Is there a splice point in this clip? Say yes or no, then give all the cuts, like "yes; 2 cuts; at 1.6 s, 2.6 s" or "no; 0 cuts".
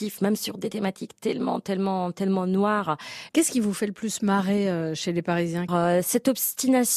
yes; 2 cuts; at 3.3 s, 5.7 s